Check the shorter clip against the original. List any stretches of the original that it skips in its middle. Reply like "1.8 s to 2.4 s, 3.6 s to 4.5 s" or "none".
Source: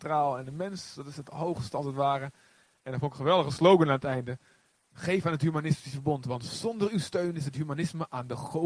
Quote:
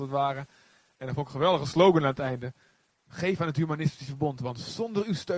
none